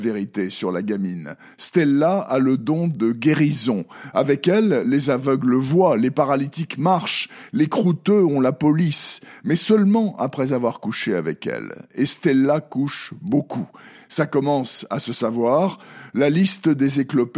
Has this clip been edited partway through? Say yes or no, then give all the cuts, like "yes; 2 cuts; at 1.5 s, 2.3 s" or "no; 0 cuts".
no; 0 cuts